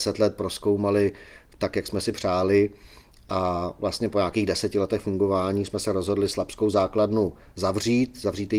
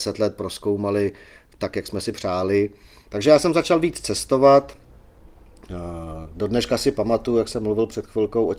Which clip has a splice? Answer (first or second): second